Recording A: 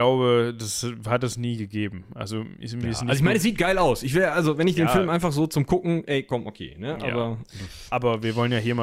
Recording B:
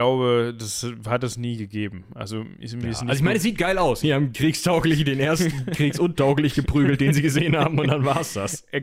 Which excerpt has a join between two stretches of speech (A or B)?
B